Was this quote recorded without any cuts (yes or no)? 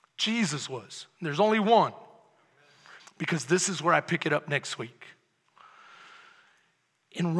no